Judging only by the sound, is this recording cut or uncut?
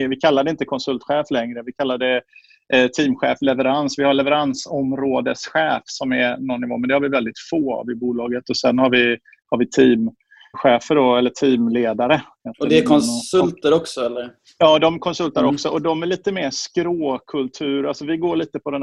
cut